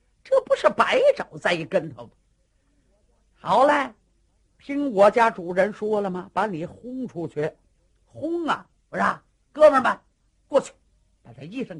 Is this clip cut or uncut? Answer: cut